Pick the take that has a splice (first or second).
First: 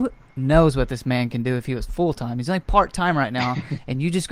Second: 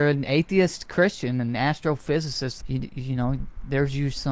second